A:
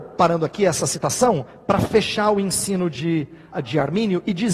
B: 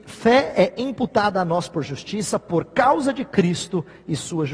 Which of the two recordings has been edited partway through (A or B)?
A